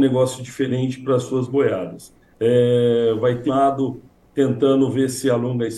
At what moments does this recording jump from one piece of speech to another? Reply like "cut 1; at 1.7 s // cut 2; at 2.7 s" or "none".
cut 1; at 2.3 s // cut 2; at 3.5 s